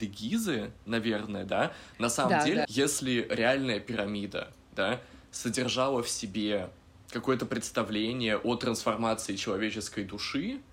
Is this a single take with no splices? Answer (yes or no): no